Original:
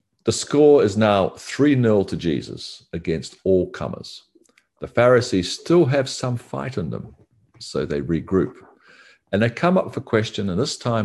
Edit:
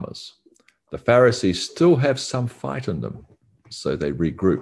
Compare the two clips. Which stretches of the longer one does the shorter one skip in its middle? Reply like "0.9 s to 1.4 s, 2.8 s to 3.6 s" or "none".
none